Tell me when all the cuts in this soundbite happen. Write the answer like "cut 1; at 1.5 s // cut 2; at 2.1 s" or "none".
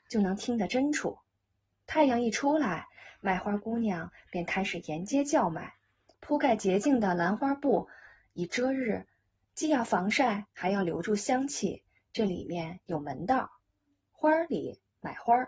cut 1; at 6.1 s